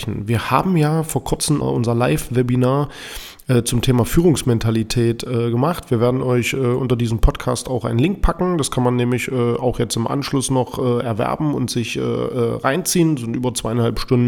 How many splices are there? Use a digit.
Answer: 1